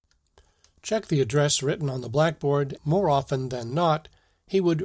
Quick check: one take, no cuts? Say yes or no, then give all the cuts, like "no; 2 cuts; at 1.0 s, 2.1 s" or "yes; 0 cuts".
no; 1 cut; at 2.8 s